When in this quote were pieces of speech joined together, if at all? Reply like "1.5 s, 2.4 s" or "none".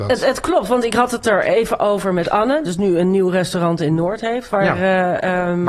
2.6 s